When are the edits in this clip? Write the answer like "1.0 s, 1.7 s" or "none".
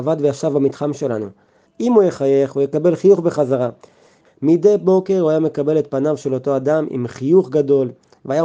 1.7 s, 4.2 s